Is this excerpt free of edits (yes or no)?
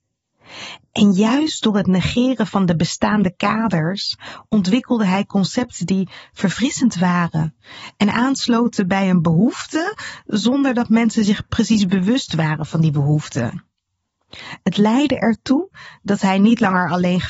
yes